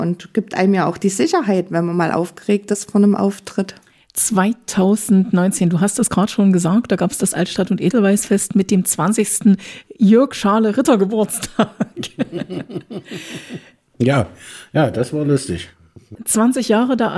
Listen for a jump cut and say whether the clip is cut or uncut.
uncut